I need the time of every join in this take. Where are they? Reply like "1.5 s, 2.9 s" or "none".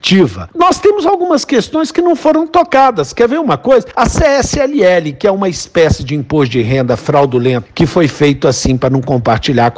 none

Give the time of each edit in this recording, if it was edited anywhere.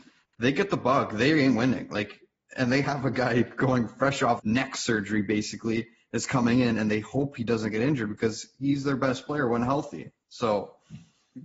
4.4 s

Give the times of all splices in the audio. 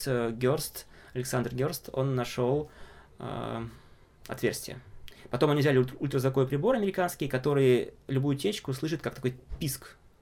none

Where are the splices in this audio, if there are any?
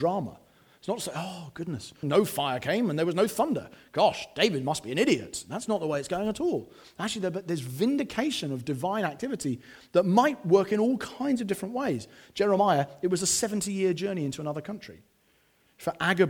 2.0 s

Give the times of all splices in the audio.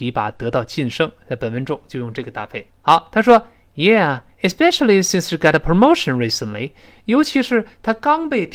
2.7 s

